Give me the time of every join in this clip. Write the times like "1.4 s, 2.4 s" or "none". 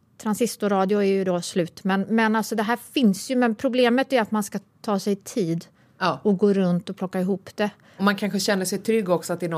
none